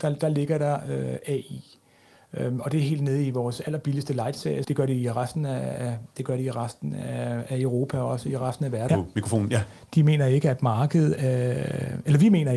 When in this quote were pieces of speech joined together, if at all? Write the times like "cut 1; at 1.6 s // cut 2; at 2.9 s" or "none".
cut 1; at 4.6 s // cut 2; at 8.9 s